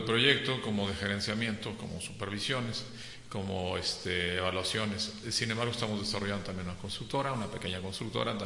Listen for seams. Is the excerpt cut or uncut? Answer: uncut